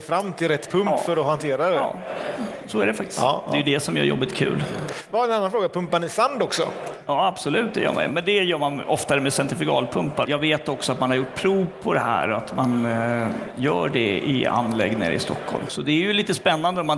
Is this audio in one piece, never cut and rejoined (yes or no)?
no